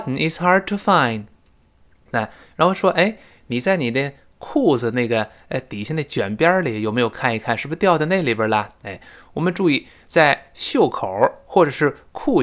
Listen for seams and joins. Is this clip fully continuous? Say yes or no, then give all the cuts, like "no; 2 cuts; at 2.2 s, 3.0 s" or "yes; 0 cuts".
no; 1 cut; at 2.1 s